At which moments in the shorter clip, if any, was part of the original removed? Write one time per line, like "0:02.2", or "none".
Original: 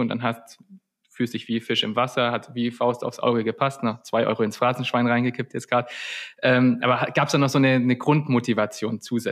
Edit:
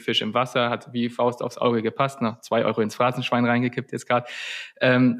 none